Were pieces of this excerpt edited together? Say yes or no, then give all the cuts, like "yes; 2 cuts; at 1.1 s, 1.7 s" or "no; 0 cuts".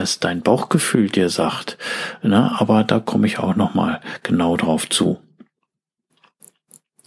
no; 0 cuts